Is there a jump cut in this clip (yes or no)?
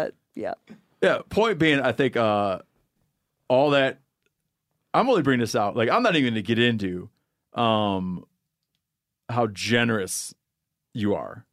no